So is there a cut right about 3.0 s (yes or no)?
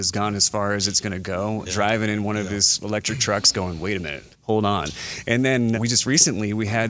no